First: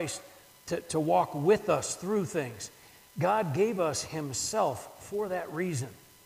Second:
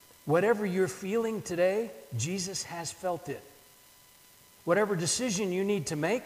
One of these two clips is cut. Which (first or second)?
second